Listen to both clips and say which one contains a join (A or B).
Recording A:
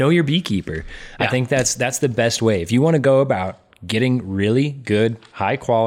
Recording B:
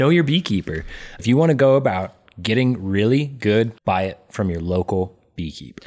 B